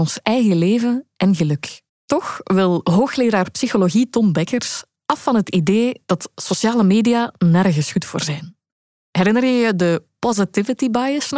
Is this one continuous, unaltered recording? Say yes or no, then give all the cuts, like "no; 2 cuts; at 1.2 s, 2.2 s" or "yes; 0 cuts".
no; 1 cut; at 1.9 s